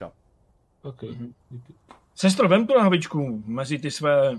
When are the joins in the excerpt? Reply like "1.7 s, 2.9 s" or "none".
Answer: 1.4 s